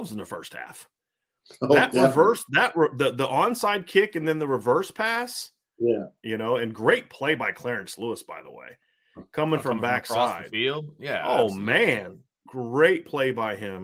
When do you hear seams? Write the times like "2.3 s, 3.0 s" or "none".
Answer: 6.2 s

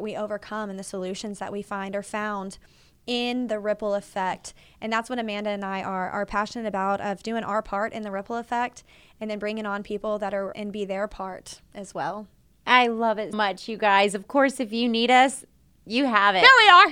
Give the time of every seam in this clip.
10.5 s, 13.3 s

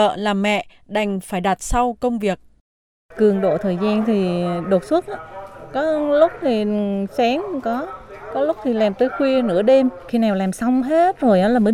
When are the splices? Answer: none

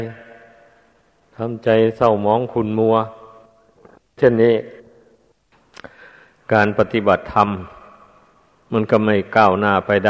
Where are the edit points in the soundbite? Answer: none

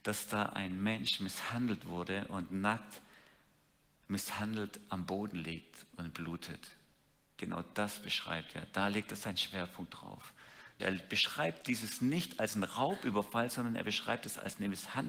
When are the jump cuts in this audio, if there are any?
10.8 s

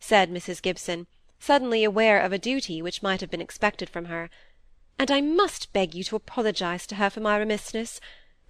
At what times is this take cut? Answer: none

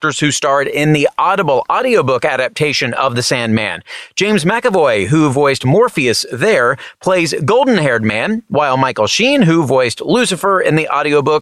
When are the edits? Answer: none

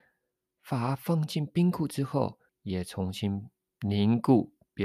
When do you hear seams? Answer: 2.5 s

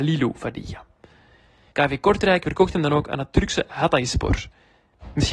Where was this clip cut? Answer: 1.7 s

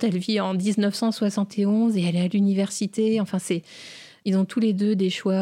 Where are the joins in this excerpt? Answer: 4.2 s

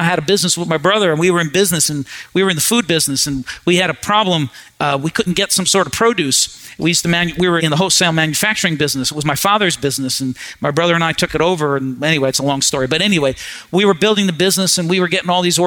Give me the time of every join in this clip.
7.6 s

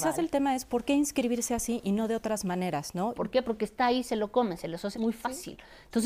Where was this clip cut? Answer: 3.1 s, 4.9 s

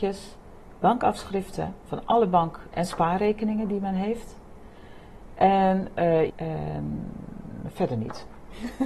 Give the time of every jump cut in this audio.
6.3 s

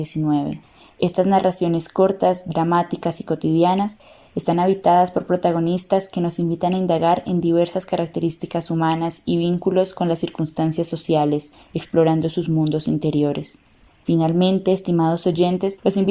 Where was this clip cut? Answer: 0.9 s, 13.9 s

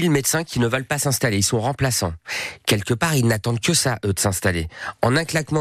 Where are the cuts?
none

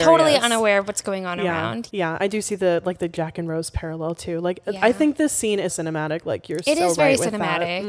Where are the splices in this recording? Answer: 1.9 s, 5.7 s

